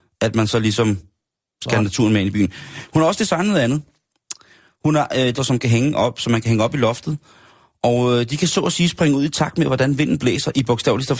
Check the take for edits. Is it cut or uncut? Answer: cut